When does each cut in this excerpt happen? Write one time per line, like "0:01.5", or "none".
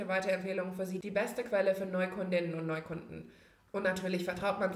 none